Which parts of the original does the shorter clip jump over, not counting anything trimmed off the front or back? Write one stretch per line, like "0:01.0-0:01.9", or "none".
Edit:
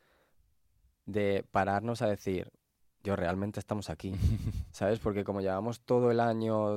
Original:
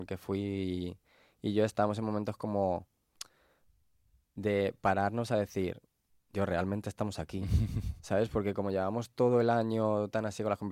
none